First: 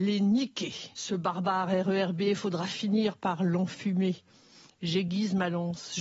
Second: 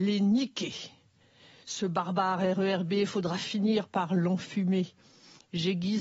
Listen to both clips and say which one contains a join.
first; 1 cut; at 0.9 s

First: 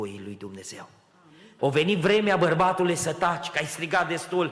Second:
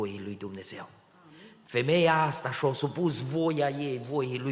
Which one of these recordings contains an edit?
first; 1 cut; at 1.6 s

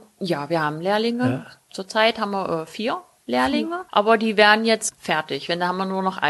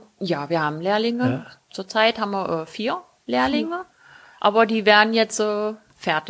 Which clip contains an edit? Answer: first; 2 cuts; at 3.9 s, 4.9 s

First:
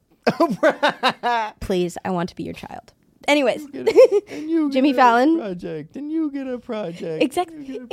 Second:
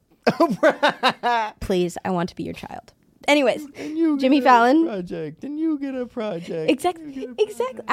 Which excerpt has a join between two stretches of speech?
second; 1 cut; at 3.7 s

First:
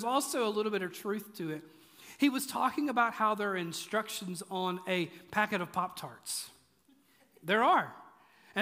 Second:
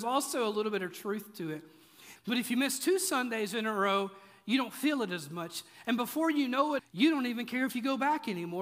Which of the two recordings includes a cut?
second; 2 cuts; at 2.2 s, 6.8 s

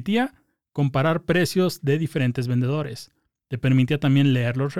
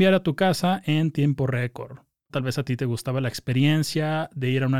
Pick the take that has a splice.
second; 1 cut; at 2.3 s

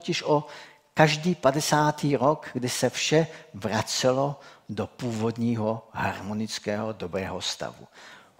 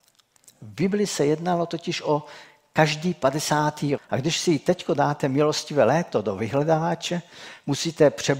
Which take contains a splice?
second; 1 cut; at 4.0 s

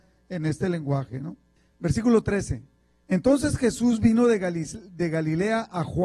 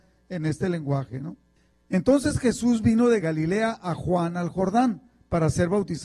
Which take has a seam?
second; 2 cuts; at 1.7 s, 3.2 s

